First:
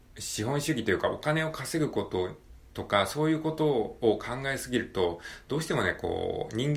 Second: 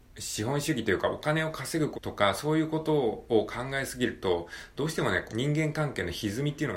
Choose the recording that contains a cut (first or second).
second